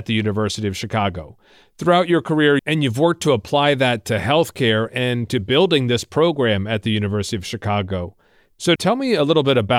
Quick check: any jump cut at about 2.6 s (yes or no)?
yes